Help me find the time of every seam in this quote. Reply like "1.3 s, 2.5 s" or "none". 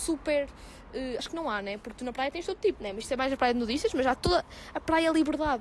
1.2 s, 2.8 s

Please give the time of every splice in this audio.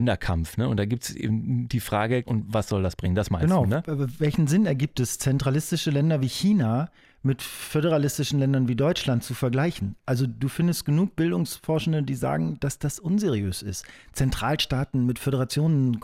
2.2 s

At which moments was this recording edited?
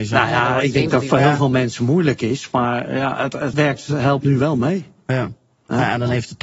3.5 s

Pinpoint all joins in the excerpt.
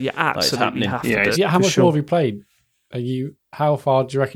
1.3 s

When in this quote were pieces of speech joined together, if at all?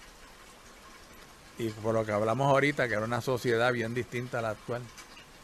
none

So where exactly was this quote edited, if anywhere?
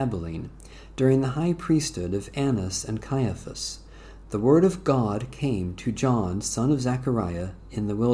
none

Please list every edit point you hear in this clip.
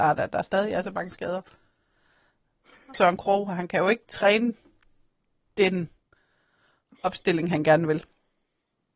2.9 s

